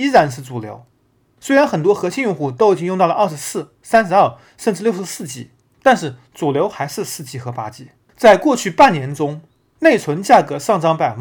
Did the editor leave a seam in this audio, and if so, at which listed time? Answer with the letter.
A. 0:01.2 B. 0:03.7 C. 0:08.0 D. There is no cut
D